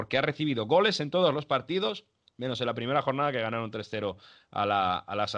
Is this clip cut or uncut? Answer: uncut